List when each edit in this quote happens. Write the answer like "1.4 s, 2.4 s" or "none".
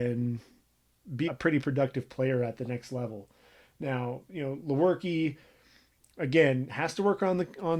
1.3 s